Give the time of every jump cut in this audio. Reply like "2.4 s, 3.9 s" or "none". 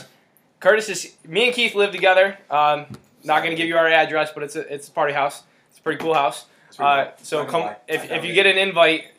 none